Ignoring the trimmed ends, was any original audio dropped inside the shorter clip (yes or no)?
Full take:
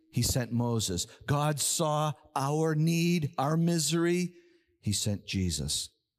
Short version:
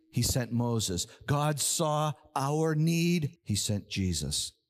yes